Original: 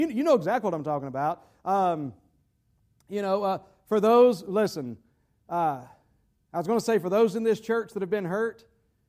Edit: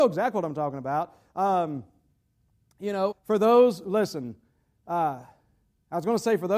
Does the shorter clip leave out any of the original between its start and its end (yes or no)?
yes